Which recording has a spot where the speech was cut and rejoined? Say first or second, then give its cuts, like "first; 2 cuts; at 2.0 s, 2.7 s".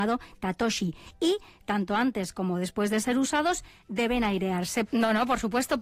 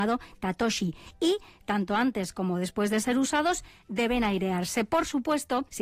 first; 1 cut; at 4.9 s